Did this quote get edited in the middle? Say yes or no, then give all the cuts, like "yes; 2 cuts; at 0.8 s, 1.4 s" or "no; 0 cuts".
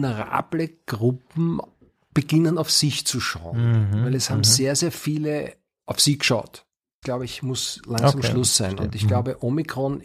yes; 1 cut; at 7.0 s